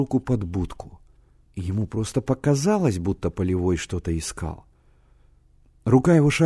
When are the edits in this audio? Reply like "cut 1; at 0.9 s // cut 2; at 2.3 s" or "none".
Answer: cut 1; at 1.5 s

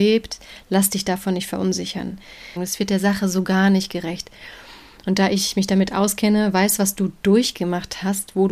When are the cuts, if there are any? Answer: cut 1; at 2.6 s

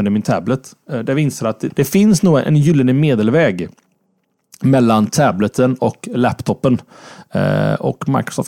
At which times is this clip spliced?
cut 1; at 1.7 s

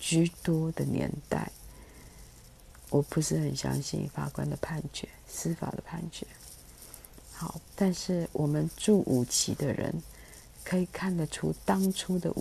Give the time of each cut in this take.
none

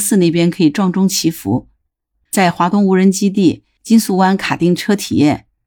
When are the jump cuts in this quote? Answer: cut 1; at 2.3 s

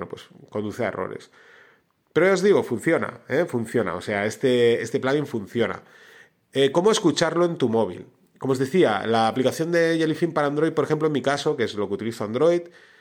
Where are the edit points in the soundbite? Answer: none

